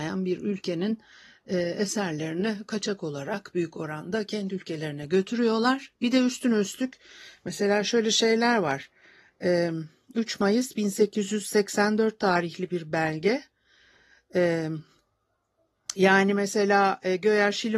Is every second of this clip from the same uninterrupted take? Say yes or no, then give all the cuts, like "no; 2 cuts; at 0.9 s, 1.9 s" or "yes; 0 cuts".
yes; 0 cuts